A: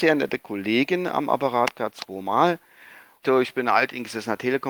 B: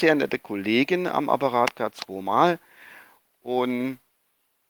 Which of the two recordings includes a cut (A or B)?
A